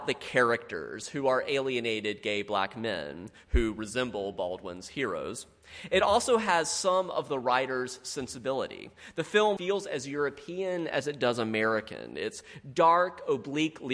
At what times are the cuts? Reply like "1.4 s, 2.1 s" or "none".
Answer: 9.6 s

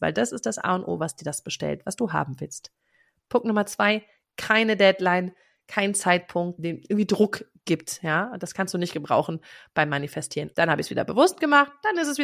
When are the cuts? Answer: 6.6 s, 10.5 s

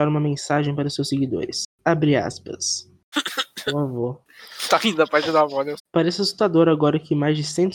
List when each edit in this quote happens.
3.1 s, 5.8 s

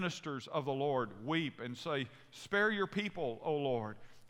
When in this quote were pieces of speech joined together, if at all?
none

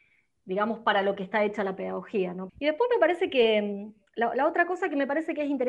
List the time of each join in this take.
2.5 s

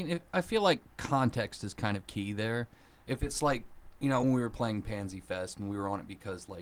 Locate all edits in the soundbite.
none

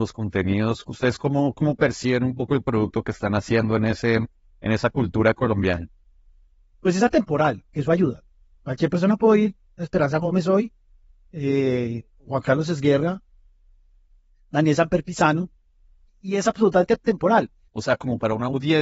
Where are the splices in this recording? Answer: 16.1 s, 17.7 s

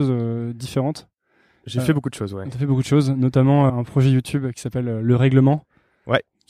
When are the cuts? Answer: 3.7 s

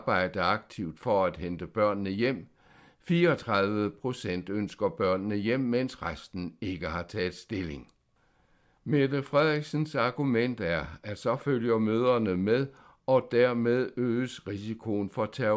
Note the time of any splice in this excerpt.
none

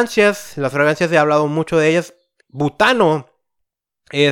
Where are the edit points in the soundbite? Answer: 2.4 s

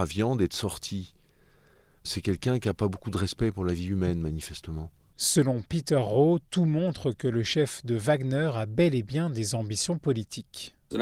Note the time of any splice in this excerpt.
2.0 s

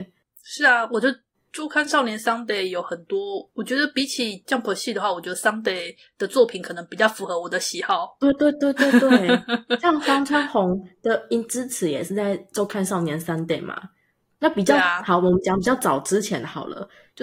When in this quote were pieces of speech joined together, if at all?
4.4 s

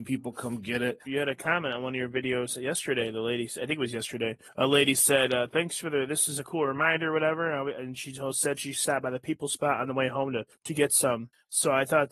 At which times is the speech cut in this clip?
1.1 s

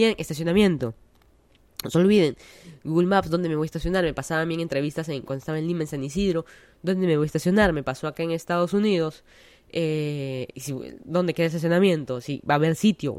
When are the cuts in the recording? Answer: none

